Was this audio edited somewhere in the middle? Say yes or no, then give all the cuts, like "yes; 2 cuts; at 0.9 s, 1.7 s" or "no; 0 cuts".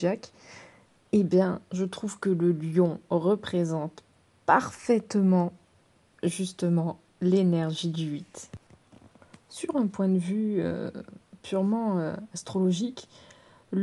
no; 0 cuts